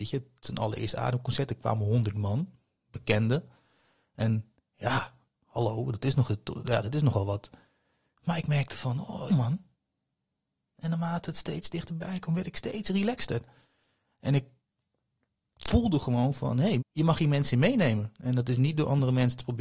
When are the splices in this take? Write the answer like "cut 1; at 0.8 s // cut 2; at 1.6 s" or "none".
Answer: cut 1; at 9.3 s // cut 2; at 16.8 s

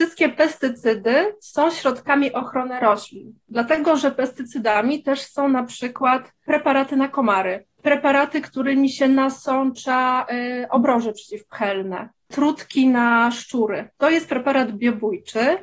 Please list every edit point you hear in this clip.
none

